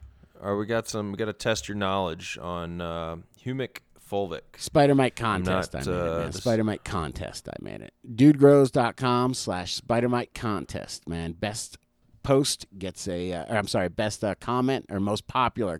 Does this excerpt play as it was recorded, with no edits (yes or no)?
yes